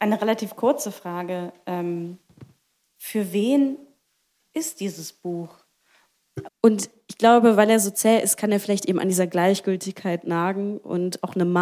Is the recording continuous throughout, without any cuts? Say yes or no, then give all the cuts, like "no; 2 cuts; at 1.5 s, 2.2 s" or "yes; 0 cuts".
no; 1 cut; at 6.5 s